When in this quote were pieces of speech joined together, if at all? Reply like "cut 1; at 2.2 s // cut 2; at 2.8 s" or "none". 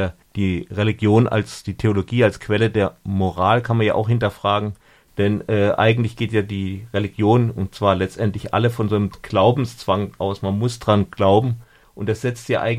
none